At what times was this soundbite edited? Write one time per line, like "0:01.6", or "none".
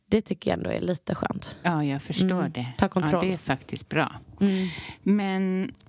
none